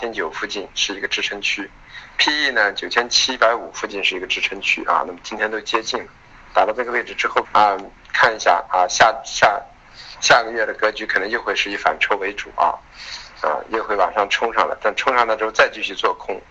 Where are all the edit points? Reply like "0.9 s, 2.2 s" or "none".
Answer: 7.4 s